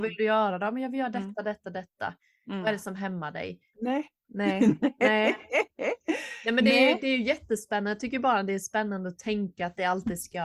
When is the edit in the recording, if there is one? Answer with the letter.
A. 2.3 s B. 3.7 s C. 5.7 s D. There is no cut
B